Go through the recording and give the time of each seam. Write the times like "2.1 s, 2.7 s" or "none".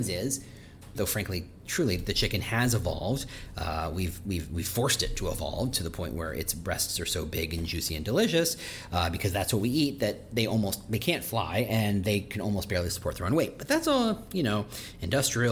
1.0 s